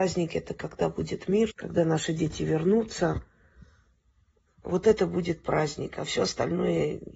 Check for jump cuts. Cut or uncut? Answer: cut